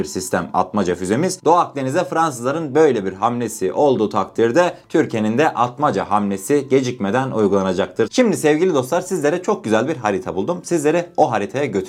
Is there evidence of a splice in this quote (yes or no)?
no